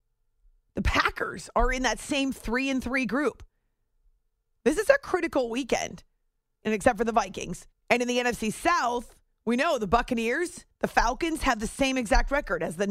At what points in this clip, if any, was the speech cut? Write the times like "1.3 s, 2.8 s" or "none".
6.6 s, 7.7 s